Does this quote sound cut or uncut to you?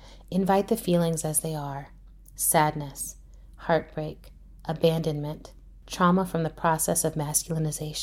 cut